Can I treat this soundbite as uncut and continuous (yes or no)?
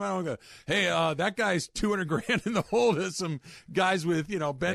yes